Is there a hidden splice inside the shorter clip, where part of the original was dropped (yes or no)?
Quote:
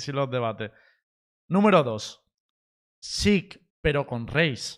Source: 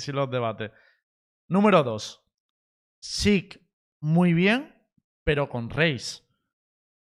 yes